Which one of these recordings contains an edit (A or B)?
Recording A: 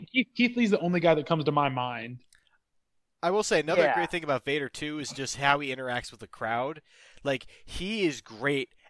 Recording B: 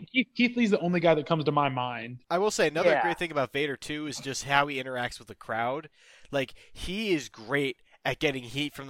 B